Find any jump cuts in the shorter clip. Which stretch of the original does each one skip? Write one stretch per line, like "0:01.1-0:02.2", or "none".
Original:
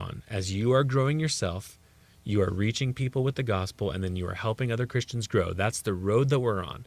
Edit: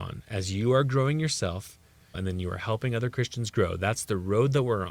0:02.1-0:03.9